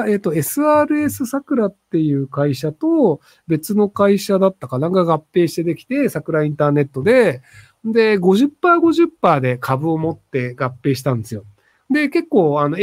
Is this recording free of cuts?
yes; 0 cuts

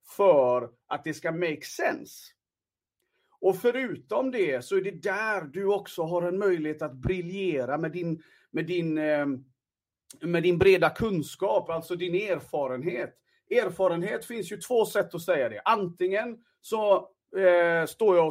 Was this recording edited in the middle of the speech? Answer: no; 0 cuts

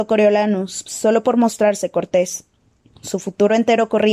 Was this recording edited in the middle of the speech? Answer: yes; 1 cut; at 2.9 s

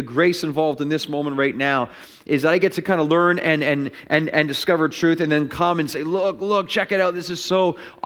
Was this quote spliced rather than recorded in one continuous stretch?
no; 0 cuts

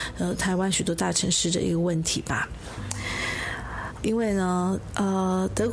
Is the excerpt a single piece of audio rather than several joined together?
no; 1 cut; at 4.0 s

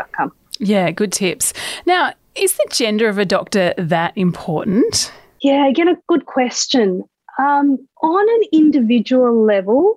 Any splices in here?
yes; 1 cut; at 7.9 s

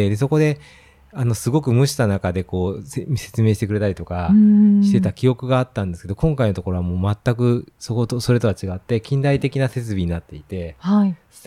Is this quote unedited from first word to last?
no; 1 cut; at 7.8 s

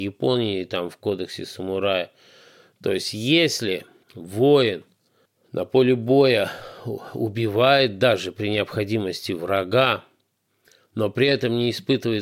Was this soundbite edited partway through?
no; 0 cuts

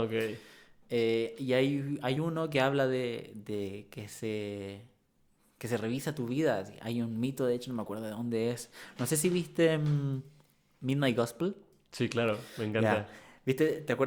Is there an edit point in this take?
no; 0 cuts

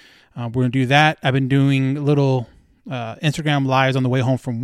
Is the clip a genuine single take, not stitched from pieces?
yes; 0 cuts

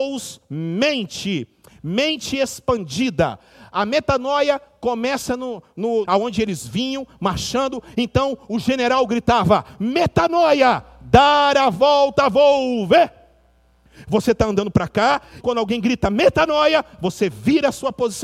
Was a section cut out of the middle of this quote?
yes; 2 cuts; at 6.0 s, 15.4 s

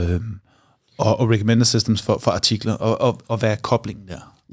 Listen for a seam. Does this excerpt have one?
no; 0 cuts

